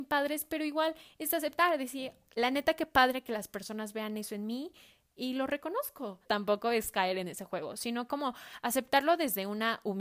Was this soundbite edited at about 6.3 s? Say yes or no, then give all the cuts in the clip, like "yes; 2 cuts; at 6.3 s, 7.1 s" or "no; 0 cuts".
yes; 1 cut; at 6.3 s